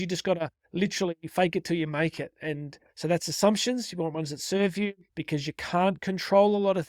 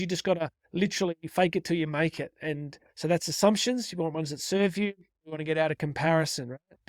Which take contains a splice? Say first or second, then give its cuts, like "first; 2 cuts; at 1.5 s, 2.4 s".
first; 1 cut; at 5.1 s